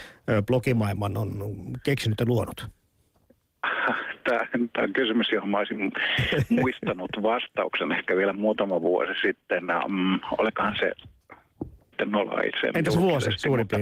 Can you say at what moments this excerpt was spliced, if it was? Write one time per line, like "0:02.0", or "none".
0:11.9